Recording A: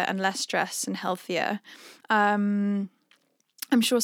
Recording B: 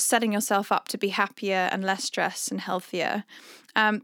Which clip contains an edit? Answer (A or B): A